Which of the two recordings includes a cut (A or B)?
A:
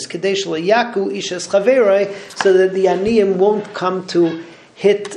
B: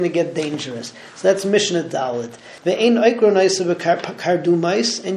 B